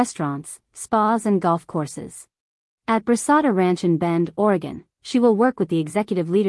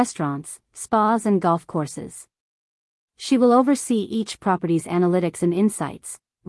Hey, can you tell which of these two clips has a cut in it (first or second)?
first